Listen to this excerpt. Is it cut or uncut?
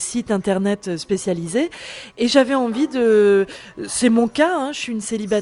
uncut